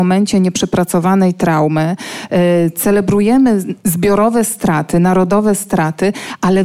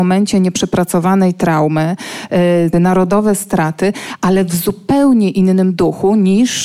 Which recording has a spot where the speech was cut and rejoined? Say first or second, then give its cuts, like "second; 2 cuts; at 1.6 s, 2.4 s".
second; 1 cut; at 2.7 s